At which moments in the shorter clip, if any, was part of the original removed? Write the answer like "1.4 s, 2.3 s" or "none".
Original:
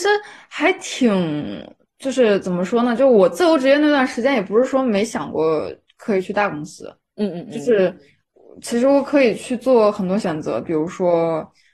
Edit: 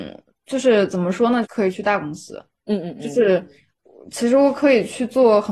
1.4 s

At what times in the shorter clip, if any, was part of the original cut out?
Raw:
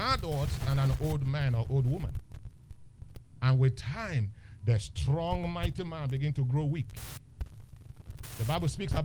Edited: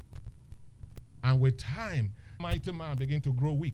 2.4 s

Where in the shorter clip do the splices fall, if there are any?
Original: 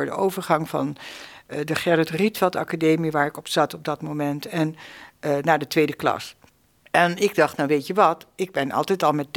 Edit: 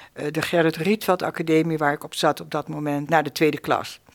3.1 s

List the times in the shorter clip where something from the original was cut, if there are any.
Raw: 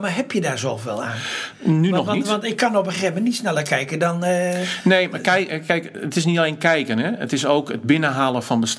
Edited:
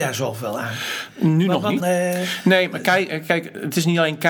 1.8 s

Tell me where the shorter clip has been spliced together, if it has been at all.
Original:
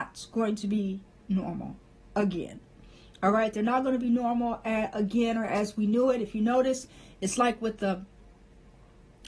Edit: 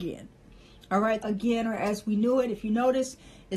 1.2 s

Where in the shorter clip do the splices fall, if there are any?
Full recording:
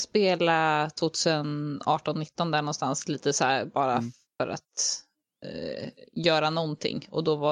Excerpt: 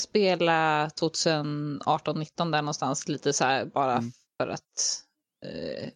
none

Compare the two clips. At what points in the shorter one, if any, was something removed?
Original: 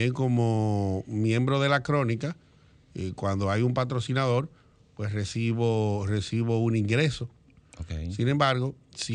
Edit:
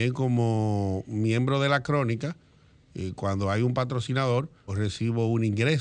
4.7 s

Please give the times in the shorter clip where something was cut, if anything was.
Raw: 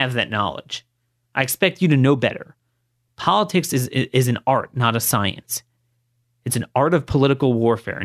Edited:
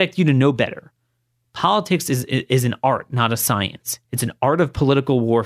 4.0 s

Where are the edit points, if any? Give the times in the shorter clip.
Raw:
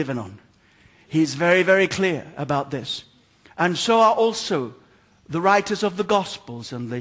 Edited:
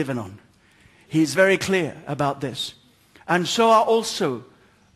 1.4 s

